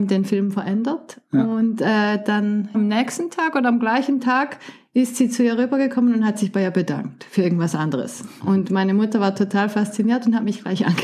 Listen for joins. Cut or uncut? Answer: cut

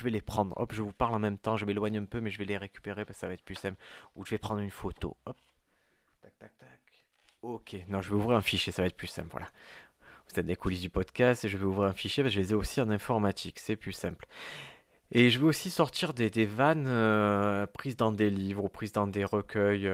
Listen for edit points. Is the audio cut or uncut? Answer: uncut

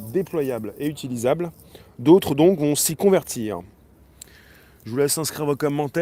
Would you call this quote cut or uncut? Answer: uncut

